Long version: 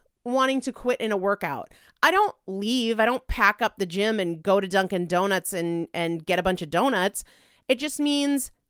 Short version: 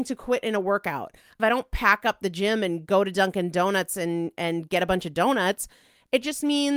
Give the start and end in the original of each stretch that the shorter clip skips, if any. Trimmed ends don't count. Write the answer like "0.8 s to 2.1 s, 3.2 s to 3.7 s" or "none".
2.0 s to 3.0 s